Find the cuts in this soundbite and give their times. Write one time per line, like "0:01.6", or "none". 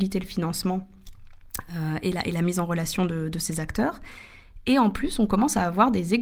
none